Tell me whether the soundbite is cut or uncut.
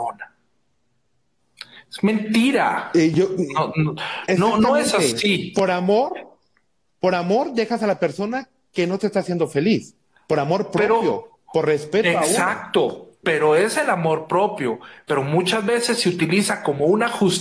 uncut